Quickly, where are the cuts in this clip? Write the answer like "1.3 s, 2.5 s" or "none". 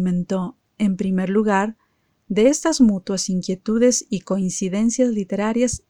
none